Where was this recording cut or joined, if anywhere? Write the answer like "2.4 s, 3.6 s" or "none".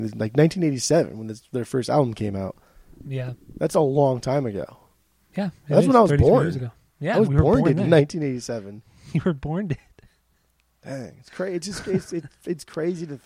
none